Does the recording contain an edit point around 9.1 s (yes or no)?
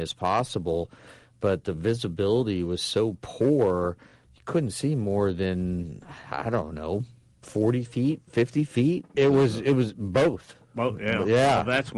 yes